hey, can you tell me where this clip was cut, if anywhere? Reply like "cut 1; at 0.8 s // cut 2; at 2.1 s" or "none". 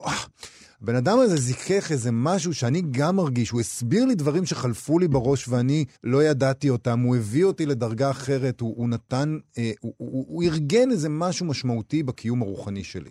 cut 1; at 6.0 s